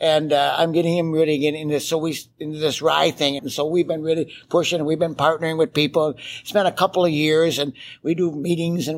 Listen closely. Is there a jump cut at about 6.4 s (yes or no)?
no